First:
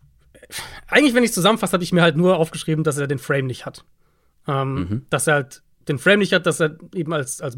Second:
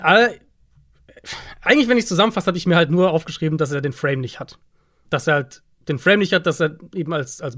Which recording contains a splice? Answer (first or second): second